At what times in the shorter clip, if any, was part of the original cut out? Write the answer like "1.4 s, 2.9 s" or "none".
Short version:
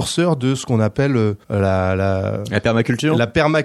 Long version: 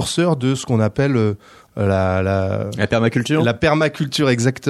1.4 s

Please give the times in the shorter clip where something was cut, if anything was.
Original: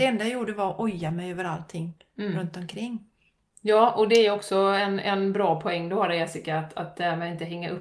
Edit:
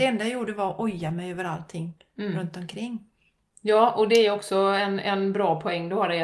none

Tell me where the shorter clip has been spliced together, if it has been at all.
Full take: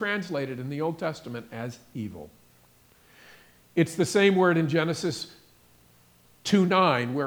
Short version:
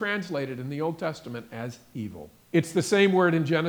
2.4 s

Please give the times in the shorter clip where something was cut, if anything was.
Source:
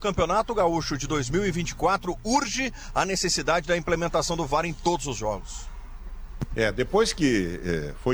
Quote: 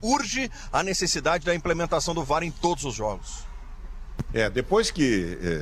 none

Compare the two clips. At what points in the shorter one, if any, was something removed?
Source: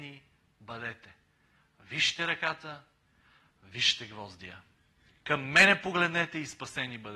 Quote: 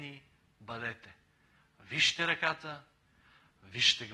none

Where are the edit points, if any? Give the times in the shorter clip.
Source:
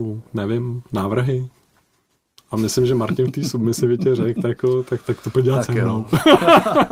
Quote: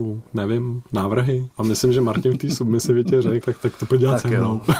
1.5 s, 3.4 s

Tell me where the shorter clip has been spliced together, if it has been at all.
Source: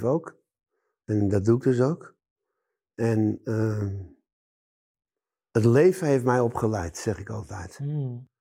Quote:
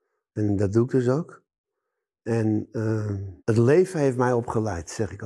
3.4 s

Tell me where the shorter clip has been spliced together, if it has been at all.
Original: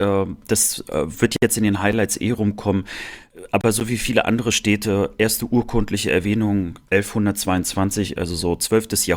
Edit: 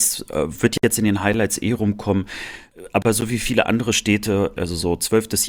4.6 s

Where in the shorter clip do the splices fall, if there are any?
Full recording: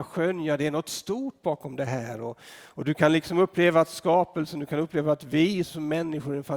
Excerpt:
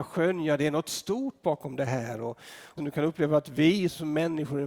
2.8 s

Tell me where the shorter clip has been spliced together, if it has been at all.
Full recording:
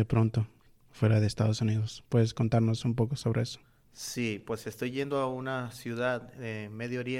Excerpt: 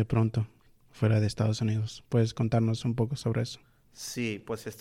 none

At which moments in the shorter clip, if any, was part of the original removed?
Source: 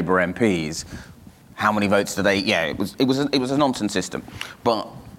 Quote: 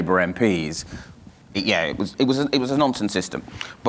1.5 s

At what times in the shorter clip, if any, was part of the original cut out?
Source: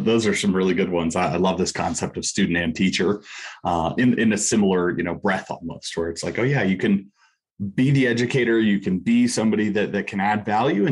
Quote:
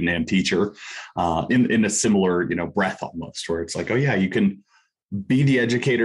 none

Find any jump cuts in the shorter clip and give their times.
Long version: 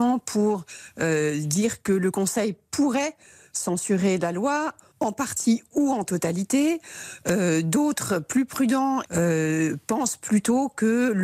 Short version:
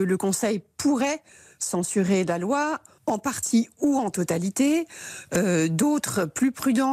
none

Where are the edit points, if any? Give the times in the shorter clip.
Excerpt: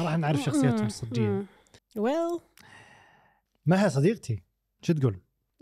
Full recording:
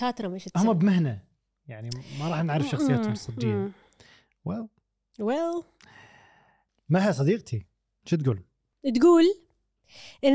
1.8 s

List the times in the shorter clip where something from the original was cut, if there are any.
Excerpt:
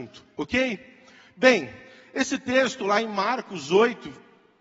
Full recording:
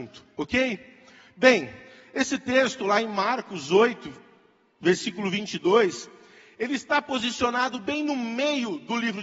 none

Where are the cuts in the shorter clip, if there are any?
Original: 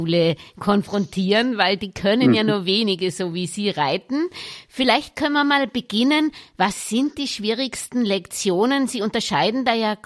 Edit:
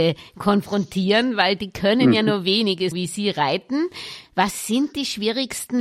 2.9 s, 4.2 s

